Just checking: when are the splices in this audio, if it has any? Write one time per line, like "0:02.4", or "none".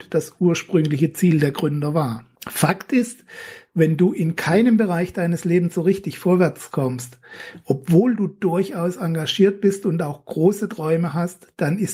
0:02.4